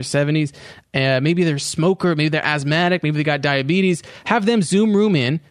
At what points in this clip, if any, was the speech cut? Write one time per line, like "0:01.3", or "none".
none